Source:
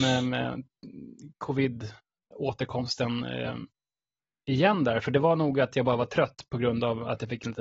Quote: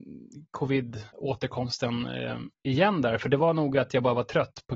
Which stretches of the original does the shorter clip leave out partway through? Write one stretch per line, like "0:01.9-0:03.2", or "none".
0:02.0-0:02.3
0:03.7-0:04.4